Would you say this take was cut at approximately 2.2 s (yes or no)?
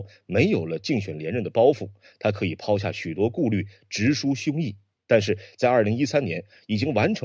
no